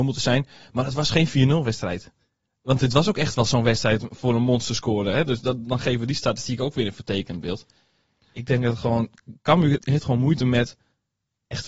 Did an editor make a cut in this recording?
yes; 1 cut; at 9.8 s

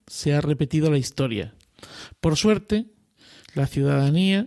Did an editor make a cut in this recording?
no; 0 cuts

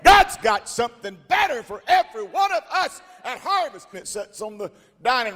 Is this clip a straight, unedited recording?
no; 1 cut; at 3.9 s

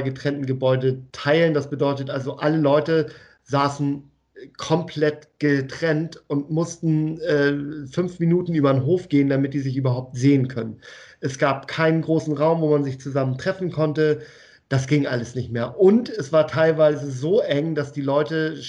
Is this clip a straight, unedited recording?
yes; 0 cuts

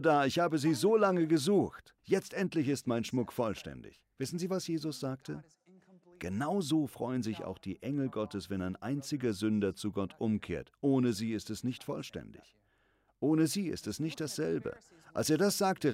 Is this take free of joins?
no; 1 cut; at 2.0 s

